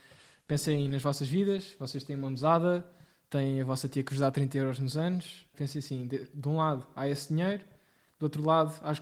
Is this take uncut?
yes; 0 cuts

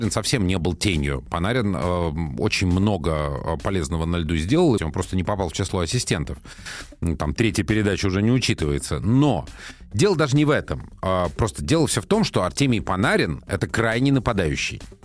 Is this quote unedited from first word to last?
no; 1 cut; at 4.8 s

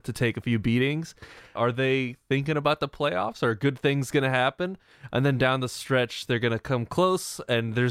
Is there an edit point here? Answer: yes; 1 cut; at 1.6 s

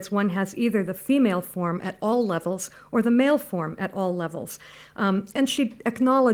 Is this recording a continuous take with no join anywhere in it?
yes; 0 cuts

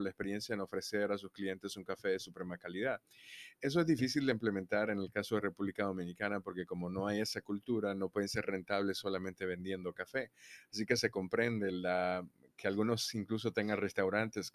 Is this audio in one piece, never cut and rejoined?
yes; 0 cuts

